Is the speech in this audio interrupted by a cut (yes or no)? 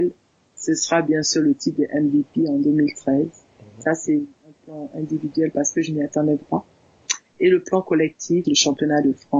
yes